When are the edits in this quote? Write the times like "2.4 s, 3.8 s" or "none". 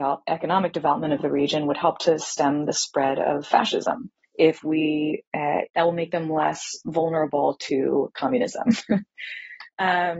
4.2 s, 5.7 s